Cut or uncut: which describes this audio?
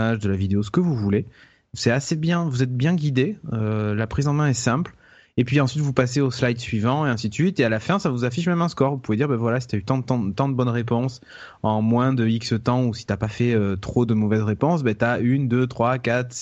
uncut